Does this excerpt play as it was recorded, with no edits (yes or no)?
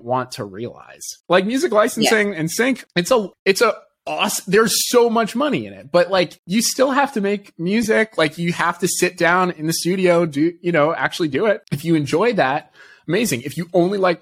yes